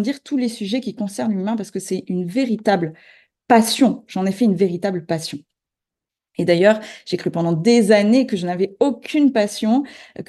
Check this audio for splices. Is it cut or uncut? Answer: uncut